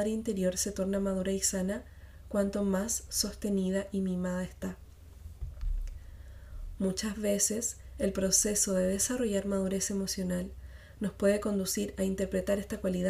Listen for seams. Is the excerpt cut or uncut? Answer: cut